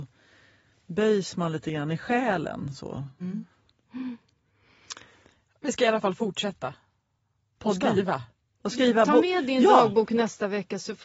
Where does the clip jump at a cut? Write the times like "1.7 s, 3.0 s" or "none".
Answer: 3.2 s